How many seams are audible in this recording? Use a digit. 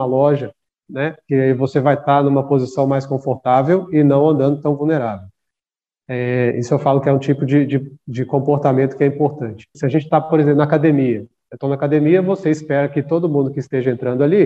1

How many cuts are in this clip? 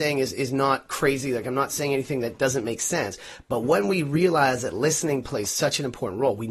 0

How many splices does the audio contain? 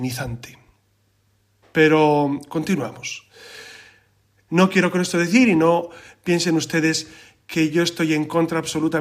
2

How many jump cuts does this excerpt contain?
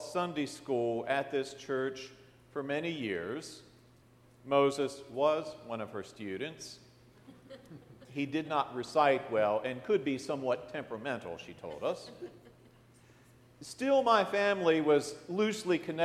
0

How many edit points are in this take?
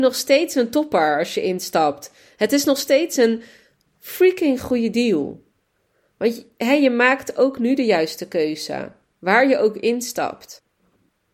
0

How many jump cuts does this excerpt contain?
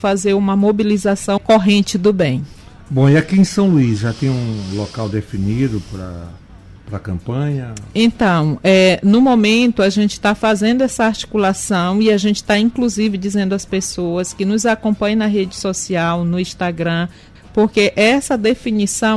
2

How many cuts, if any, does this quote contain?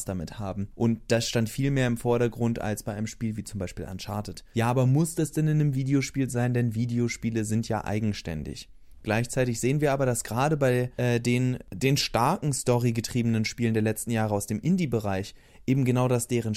1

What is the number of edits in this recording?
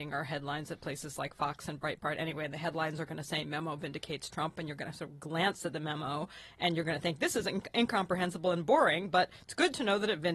0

